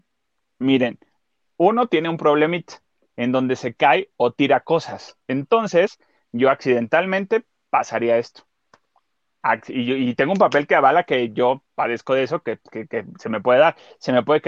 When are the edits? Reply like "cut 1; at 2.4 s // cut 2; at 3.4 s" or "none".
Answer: none

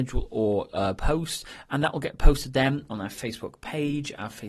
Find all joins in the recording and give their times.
none

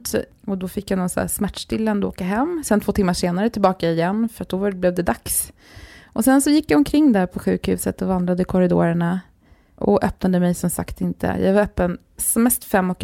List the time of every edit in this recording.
none

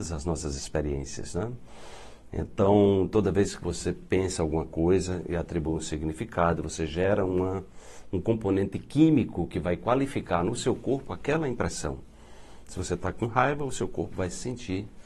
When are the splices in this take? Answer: none

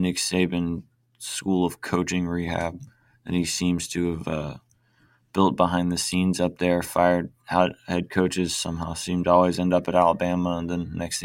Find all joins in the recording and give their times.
none

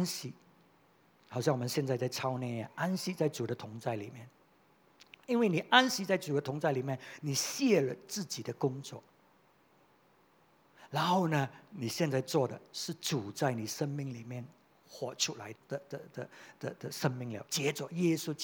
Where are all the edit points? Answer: cut 1; at 15.5 s // cut 2; at 17.5 s

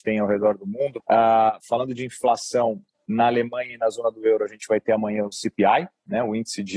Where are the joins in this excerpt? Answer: cut 1; at 1.0 s

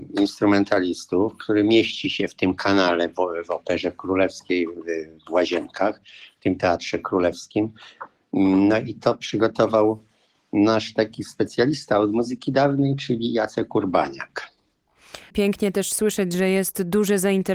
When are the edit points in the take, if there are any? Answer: cut 1; at 15.3 s

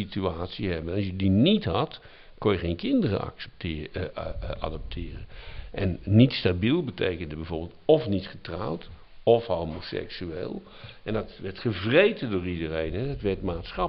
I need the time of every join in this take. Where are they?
none

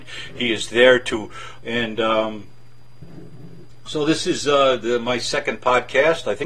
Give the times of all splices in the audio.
cut 1; at 1.6 s

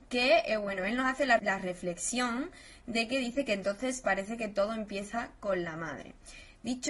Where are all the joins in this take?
cut 1; at 1.4 s

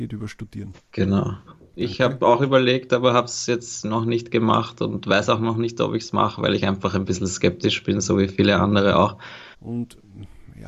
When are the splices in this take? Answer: cut 1; at 1.5 s // cut 2; at 9.5 s

